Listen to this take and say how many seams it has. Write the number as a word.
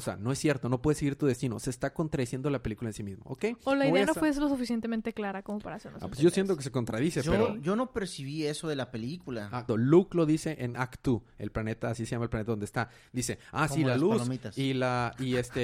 one